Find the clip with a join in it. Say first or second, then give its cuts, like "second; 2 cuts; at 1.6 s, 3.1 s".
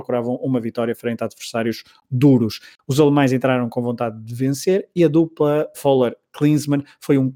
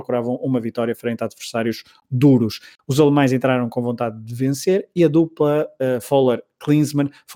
first; 1 cut; at 5.7 s